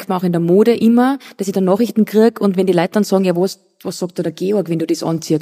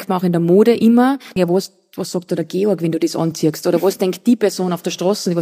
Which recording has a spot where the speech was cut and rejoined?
second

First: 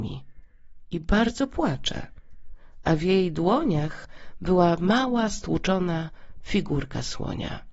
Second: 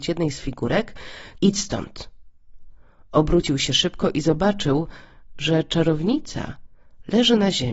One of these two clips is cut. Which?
second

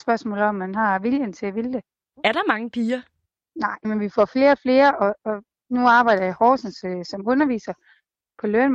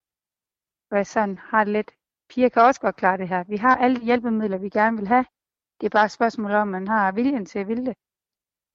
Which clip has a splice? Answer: first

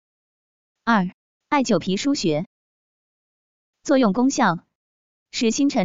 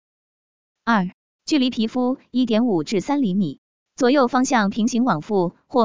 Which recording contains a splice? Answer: second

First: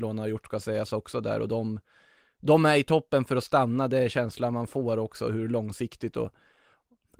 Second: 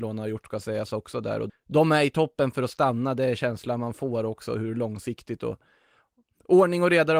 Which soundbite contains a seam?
second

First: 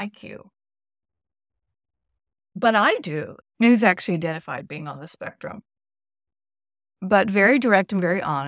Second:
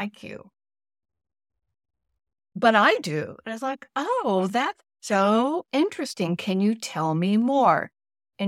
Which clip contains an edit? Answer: first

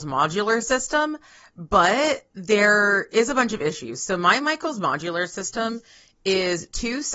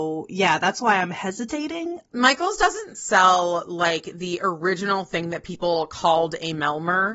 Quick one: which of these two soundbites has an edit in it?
second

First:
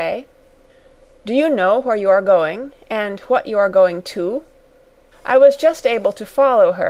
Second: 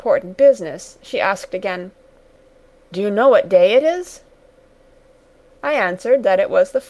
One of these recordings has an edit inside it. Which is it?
first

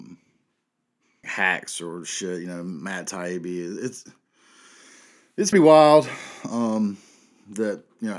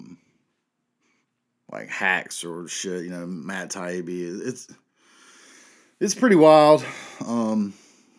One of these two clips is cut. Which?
first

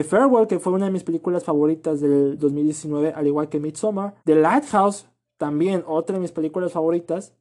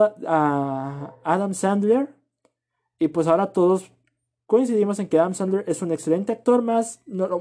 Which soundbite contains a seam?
first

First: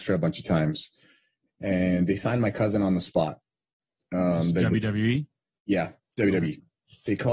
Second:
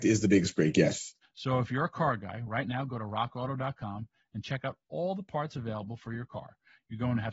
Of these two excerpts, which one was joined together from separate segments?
second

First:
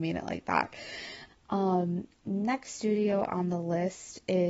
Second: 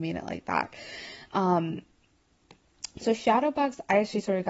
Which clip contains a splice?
first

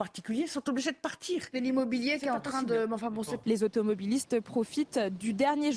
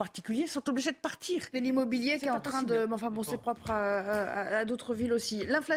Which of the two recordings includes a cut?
first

